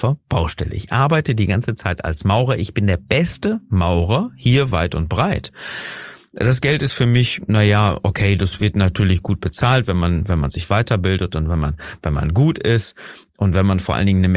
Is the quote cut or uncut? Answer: uncut